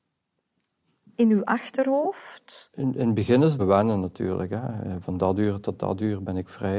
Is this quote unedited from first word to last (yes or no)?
no